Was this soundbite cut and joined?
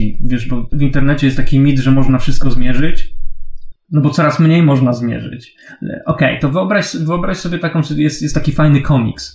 no; 0 cuts

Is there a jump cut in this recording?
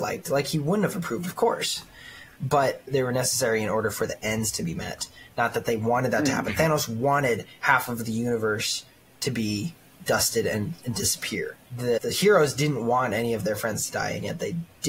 no; 0 cuts

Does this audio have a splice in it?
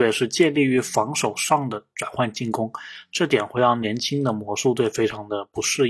no; 0 cuts

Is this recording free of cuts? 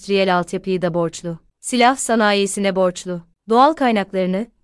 yes; 0 cuts

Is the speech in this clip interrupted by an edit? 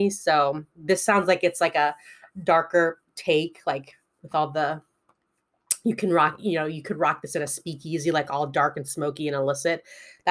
no; 0 cuts

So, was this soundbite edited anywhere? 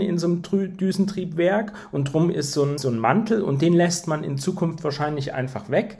yes; 1 cut; at 2.8 s

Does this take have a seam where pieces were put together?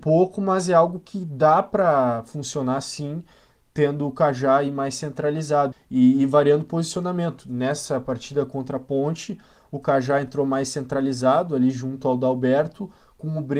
yes; 1 cut; at 5.7 s

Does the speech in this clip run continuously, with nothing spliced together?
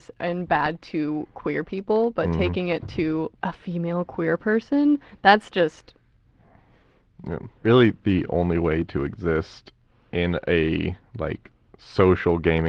no; 2 cuts; at 3.3 s, 7.6 s

